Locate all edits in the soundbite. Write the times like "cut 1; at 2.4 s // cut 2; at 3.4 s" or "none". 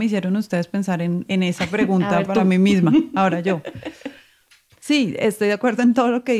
none

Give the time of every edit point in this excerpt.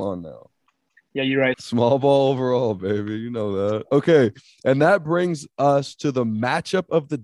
cut 1; at 1.5 s

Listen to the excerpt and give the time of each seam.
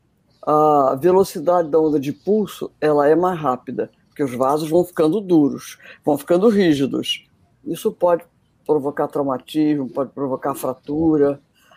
cut 1; at 7.6 s

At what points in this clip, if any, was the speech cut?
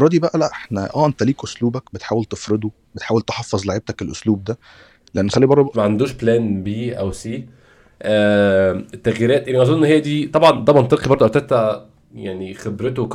cut 1; at 5.7 s

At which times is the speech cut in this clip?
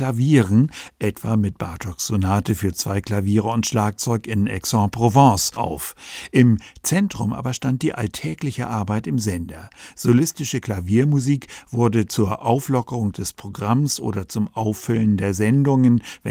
none

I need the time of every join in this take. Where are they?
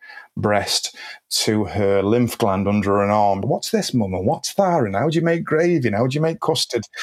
cut 1; at 3.4 s

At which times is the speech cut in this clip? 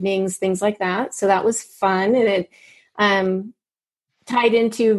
none

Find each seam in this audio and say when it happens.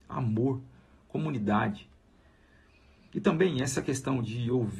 none

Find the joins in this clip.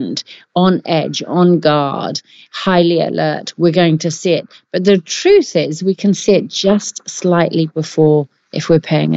none

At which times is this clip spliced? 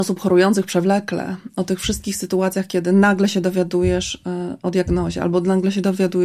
none

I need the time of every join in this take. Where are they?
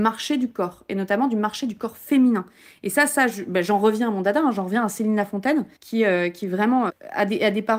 cut 1; at 5.8 s // cut 2; at 6.9 s

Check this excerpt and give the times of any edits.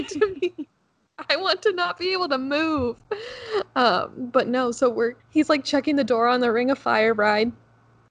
cut 1; at 5.2 s

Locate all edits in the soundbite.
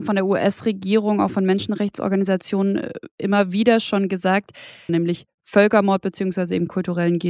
cut 1; at 4.9 s

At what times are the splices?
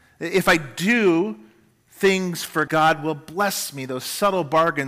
cut 1; at 2.7 s

